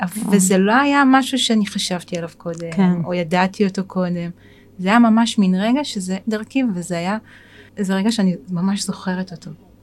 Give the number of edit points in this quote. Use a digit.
2